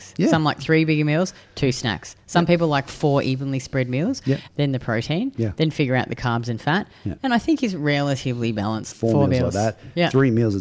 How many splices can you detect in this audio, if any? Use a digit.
3